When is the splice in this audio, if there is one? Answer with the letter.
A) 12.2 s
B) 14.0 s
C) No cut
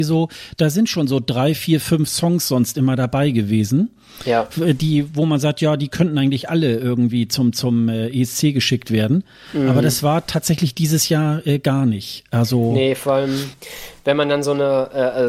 C